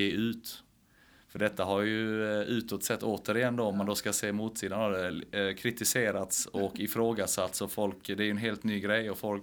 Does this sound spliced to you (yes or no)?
no